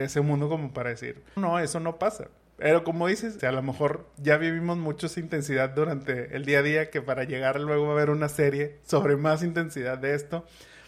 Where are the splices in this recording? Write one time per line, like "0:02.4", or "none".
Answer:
0:01.4
0:03.4